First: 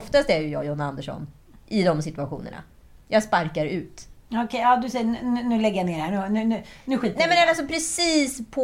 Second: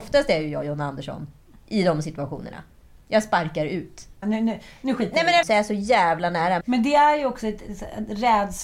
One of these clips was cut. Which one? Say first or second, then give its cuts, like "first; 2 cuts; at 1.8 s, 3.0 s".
second; 3 cuts; at 4.2 s, 5.4 s, 6.6 s